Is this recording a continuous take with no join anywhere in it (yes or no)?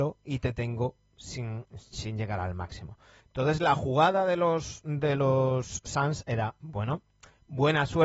no